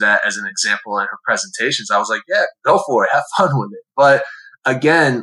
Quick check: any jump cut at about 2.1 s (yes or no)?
no